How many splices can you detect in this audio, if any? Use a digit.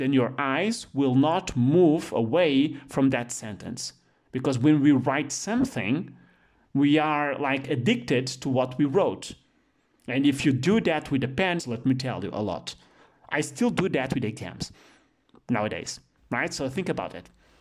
1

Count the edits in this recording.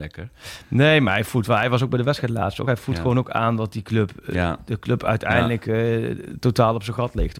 0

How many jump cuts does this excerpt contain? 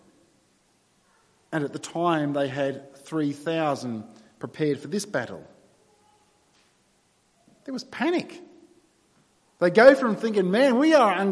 0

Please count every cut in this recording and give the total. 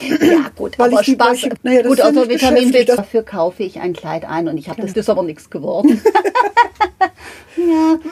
3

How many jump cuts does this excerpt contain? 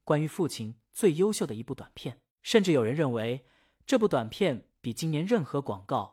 1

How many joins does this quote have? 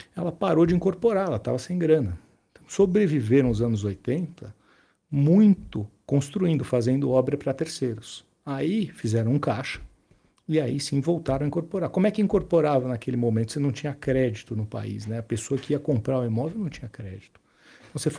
1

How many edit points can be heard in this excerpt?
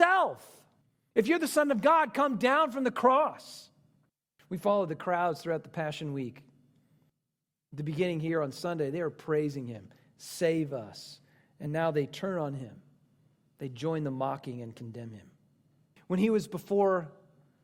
0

